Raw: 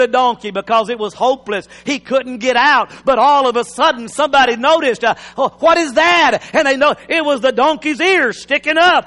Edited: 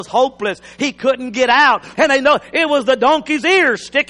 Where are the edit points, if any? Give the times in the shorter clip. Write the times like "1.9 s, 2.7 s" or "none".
2.0 s